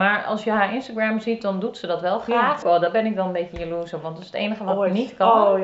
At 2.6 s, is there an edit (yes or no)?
yes